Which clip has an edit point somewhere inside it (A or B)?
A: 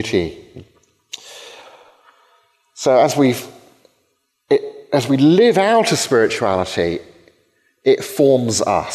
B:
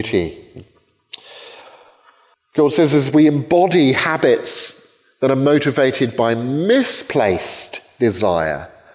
B